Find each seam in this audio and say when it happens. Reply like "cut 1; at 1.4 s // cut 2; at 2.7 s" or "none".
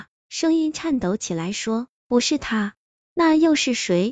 cut 1; at 3.0 s